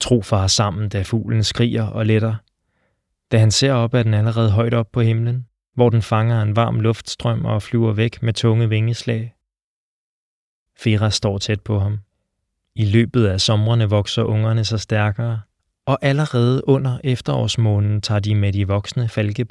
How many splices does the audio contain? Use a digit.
1